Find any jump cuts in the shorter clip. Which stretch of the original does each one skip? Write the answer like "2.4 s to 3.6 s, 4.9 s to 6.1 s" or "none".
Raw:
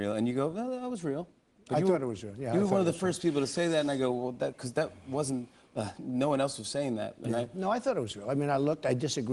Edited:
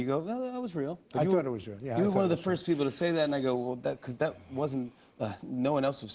1.3 s to 1.6 s